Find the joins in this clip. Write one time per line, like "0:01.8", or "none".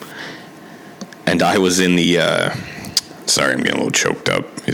none